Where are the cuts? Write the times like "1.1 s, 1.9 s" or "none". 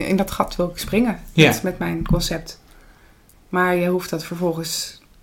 3.3 s